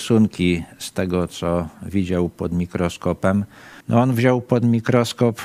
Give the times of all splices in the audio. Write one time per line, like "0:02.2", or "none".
0:03.8